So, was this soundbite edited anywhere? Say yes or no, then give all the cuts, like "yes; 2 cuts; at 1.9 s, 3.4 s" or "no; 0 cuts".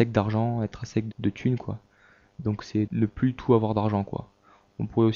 yes; 2 cuts; at 1.1 s, 2.9 s